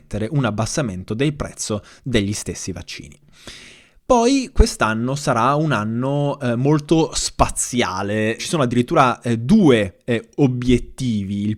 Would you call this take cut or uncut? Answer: cut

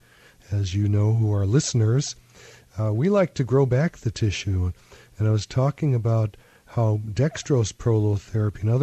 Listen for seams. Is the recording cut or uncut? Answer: uncut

